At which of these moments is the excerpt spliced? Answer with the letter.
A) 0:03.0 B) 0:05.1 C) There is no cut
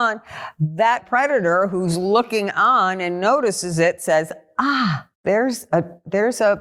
B